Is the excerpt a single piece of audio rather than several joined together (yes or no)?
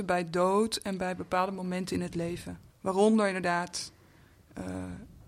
no